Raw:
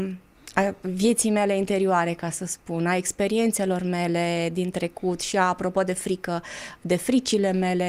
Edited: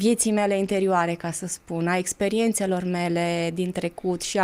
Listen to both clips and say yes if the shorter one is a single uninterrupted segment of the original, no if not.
yes